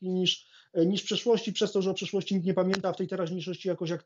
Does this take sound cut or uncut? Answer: uncut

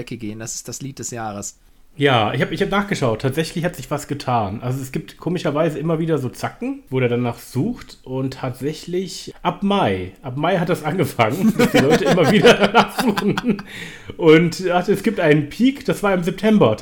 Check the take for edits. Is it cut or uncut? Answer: uncut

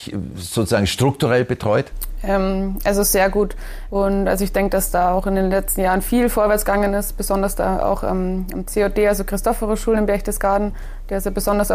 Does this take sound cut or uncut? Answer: cut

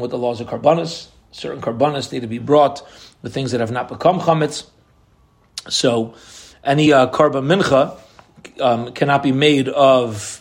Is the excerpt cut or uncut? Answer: uncut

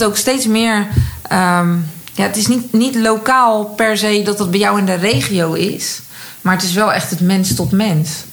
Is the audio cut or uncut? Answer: uncut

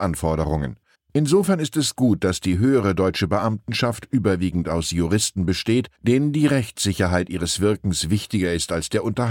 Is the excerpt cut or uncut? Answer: cut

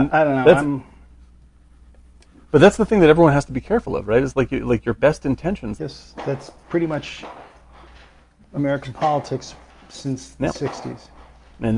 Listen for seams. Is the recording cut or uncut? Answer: cut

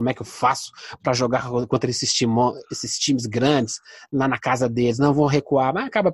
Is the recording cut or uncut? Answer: uncut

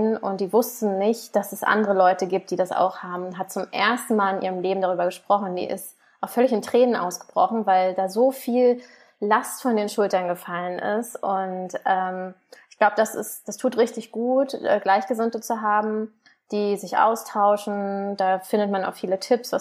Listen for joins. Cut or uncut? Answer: uncut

